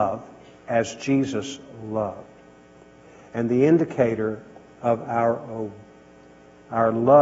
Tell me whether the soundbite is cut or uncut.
uncut